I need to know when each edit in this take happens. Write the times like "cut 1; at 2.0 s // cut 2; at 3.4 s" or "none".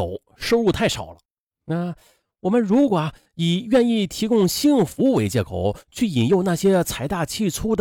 none